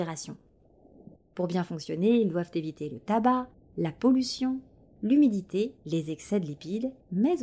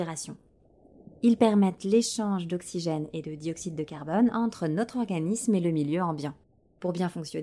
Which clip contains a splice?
first; 1 cut; at 1.2 s

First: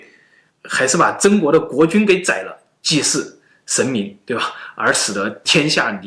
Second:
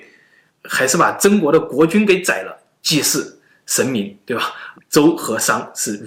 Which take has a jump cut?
second; 1 cut; at 4.7 s

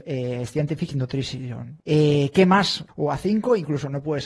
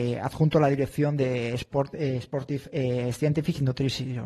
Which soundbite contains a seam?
first; 2 cuts; at 1.8 s, 2.9 s

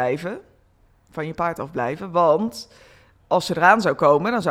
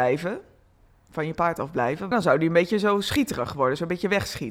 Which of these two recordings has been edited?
second; 1 cut; at 2.1 s

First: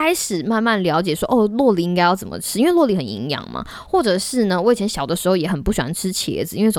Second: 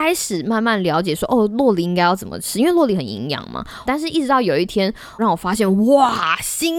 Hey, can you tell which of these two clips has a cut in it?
second; 2 cuts; at 3.9 s, 5.2 s

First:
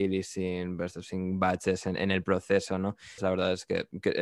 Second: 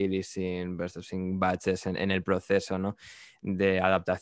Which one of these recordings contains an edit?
first; 1 cut; at 3.2 s

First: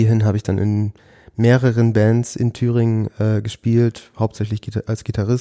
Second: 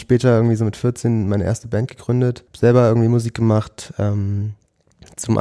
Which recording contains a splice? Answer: second; 1 cut; at 2.5 s

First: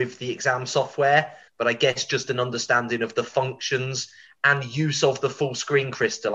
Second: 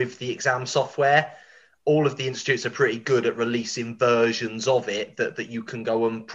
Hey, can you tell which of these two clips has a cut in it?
first; 1 cut; at 1.5 s

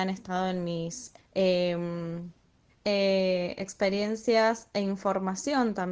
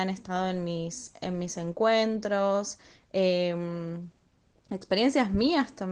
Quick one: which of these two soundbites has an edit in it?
first; 2 cuts; at 1.2 s, 2.7 s

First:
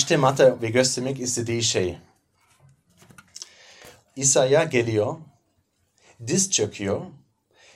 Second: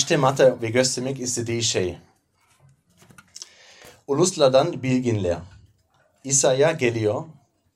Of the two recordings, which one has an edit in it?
first; 1 cut; at 4.0 s

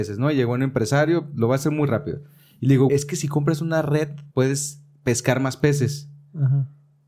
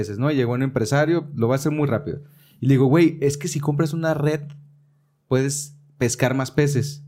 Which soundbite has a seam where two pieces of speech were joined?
first; 2 cuts; at 2.9 s, 4.3 s

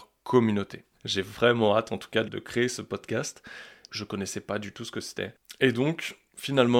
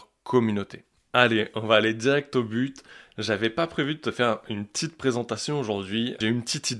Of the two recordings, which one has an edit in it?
first; 3 cuts; at 0.9 s, 2.2 s, 3.9 s

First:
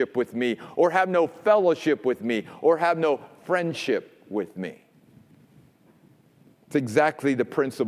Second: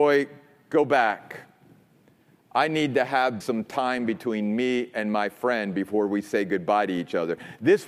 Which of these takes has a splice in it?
second; 1 cut; at 3.4 s

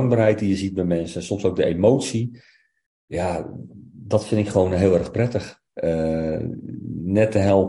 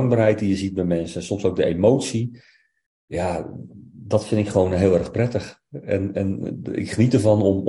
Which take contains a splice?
first; 1 cut; at 5.7 s

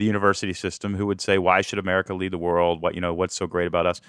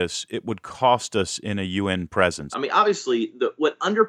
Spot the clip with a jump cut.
second; 1 cut; at 2.5 s

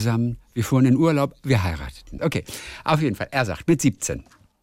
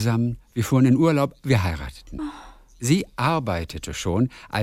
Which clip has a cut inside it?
first; 1 cut; at 2.2 s

